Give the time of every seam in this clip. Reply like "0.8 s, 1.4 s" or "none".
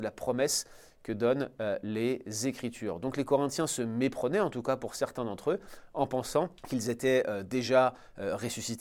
none